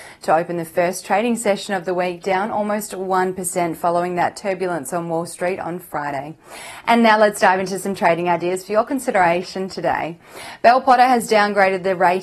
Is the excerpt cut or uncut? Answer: uncut